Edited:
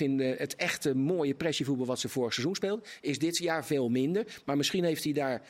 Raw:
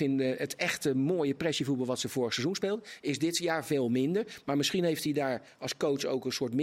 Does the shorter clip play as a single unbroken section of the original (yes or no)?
yes